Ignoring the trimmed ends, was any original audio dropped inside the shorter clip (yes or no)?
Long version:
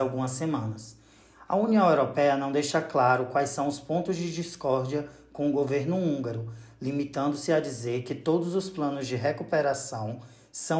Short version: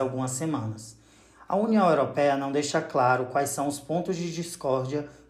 no